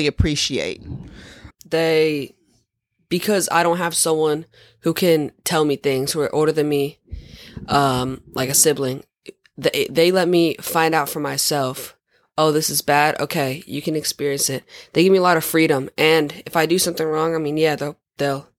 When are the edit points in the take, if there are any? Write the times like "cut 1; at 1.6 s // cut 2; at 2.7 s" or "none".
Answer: cut 1; at 1.5 s